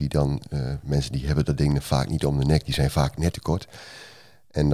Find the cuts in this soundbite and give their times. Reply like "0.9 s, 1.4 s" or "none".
3.3 s

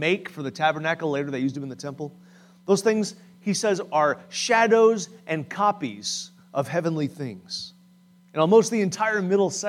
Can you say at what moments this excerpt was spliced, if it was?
8.2 s

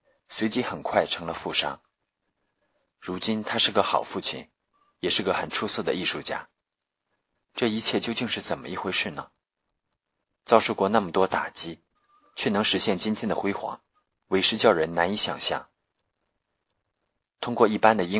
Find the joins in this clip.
none

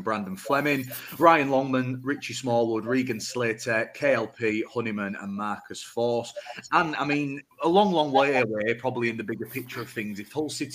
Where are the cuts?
7.5 s

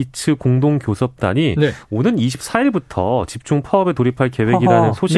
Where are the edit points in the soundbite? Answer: none

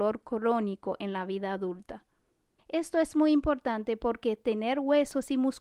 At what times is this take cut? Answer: 2.6 s

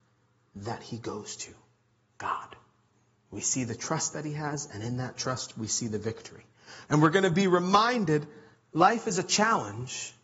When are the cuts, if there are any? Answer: 6.9 s

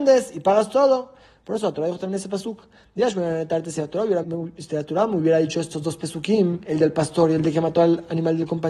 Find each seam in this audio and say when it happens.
4.2 s

